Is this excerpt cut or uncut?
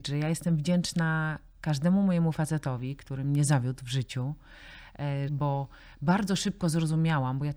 cut